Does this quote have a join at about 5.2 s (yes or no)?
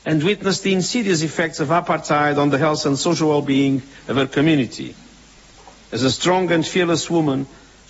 no